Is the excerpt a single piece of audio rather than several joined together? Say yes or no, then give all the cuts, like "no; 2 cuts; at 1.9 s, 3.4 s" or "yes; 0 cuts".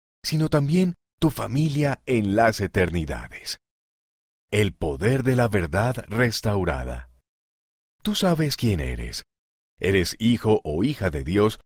yes; 0 cuts